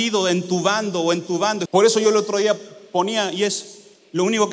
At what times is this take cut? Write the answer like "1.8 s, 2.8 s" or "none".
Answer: 1.7 s